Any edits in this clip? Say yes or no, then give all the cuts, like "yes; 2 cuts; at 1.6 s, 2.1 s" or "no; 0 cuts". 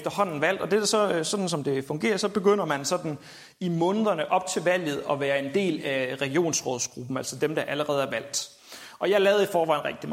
no; 0 cuts